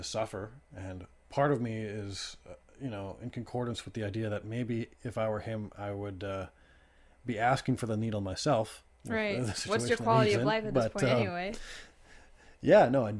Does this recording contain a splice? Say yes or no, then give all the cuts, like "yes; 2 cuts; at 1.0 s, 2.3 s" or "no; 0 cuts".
no; 0 cuts